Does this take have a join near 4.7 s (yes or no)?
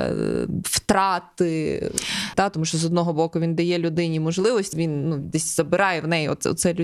yes